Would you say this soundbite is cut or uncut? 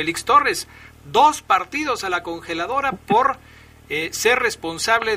uncut